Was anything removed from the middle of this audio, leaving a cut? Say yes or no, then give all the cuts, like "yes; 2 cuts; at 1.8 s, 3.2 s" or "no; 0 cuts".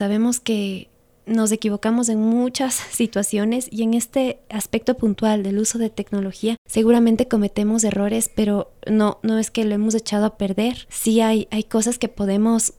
no; 0 cuts